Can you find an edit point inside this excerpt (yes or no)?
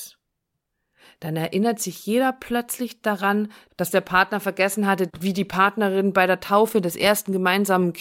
yes